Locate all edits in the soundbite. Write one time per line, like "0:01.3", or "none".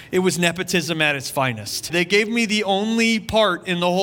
0:01.9